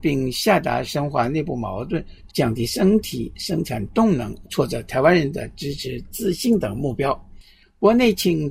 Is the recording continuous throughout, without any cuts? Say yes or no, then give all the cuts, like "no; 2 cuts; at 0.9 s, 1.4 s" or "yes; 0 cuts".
no; 2 cuts; at 2.3 s, 4.4 s